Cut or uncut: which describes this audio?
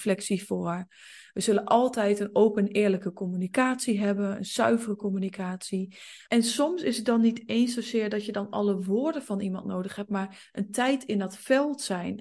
cut